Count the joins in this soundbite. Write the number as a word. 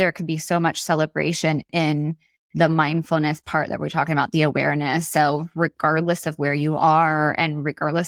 zero